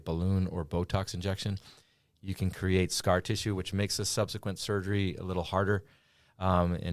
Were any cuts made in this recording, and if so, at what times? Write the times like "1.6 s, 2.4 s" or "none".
none